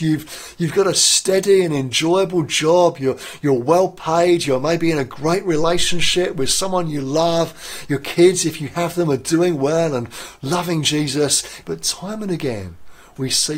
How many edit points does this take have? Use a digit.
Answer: 1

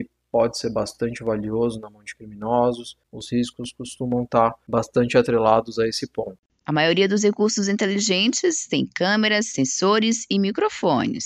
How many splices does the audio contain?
1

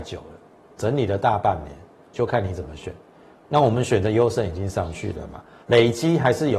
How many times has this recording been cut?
2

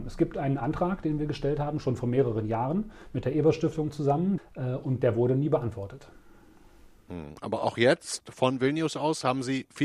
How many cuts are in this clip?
1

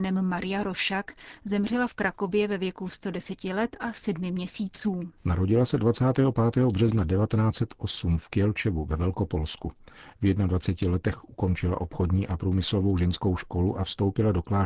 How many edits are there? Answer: 1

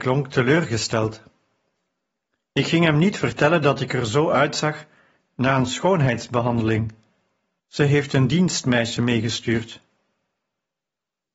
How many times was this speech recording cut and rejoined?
1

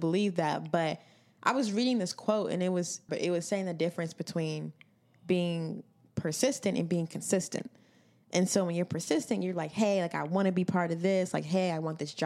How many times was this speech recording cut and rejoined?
1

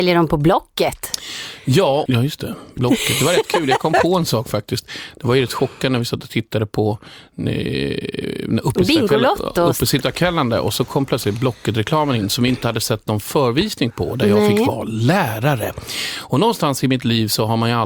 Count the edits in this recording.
1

